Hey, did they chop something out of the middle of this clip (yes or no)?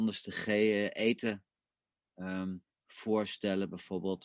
no